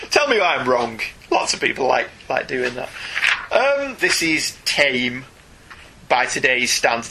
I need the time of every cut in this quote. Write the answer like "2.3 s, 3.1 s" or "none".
4.0 s